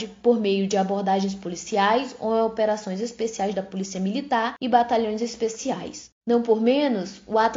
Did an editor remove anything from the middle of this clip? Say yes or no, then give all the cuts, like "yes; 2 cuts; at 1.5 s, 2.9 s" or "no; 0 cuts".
yes; 1 cut; at 6.2 s